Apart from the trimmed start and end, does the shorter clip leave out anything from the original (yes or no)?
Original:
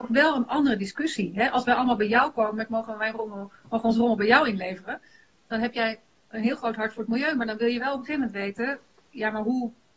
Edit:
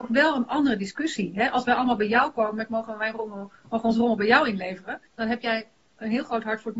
yes